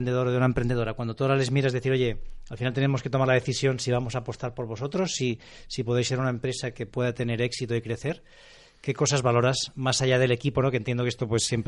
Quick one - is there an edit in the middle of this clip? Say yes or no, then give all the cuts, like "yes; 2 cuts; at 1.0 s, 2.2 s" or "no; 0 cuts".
no; 0 cuts